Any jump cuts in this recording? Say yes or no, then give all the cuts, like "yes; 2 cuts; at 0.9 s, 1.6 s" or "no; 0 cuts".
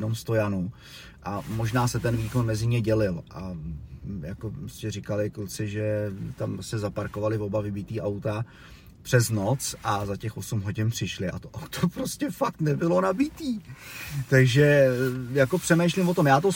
no; 0 cuts